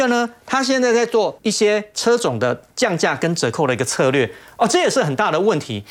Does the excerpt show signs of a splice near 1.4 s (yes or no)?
yes